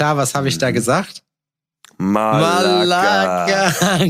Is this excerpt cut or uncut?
uncut